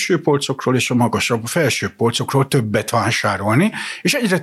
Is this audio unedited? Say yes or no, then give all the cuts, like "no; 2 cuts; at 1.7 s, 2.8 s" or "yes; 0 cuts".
yes; 0 cuts